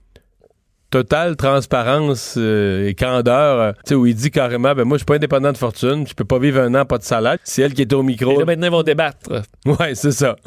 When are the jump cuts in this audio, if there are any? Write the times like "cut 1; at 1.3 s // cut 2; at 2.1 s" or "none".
cut 1; at 3.8 s // cut 2; at 7.4 s